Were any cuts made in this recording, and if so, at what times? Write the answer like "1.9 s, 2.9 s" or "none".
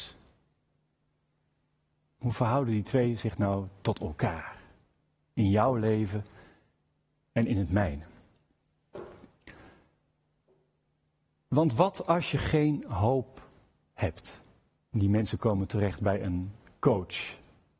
14.8 s